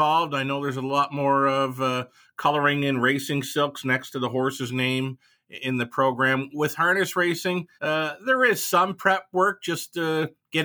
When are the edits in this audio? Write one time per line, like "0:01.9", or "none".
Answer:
0:07.8